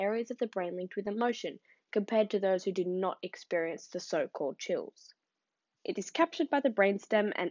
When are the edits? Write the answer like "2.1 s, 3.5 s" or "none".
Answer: 5.8 s